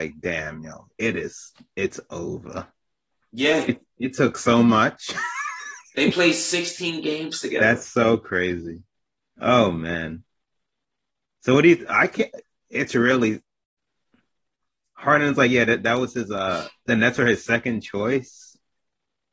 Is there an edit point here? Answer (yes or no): no